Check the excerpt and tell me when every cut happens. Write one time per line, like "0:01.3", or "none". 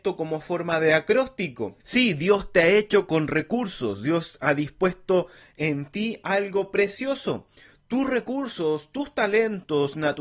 0:01.8